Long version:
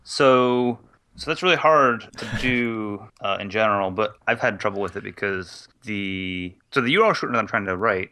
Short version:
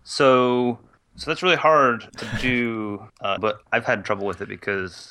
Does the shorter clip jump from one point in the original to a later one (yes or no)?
yes